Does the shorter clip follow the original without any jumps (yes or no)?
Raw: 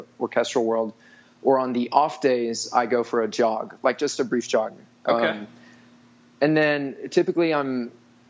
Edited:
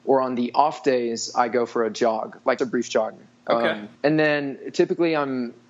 no